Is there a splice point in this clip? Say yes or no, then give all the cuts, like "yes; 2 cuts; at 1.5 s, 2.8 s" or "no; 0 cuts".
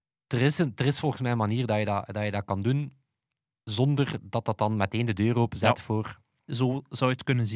yes; 1 cut; at 6.5 s